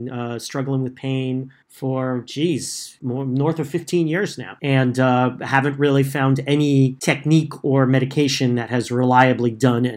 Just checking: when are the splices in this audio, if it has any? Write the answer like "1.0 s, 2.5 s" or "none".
1.6 s